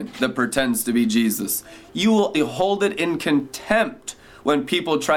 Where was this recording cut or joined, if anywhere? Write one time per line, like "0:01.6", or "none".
0:02.3